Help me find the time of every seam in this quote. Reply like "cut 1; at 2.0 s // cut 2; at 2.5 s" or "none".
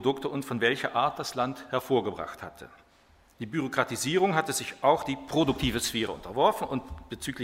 cut 1; at 3.4 s // cut 2; at 6.1 s